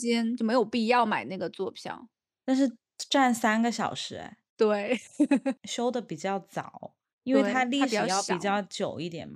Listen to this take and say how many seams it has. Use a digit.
1